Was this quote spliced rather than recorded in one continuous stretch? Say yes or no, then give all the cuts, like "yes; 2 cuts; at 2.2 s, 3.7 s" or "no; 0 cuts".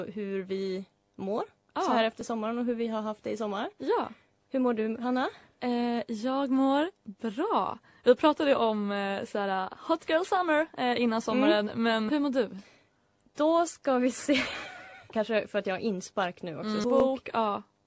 yes; 3 cuts; at 12.1 s, 15.1 s, 16.8 s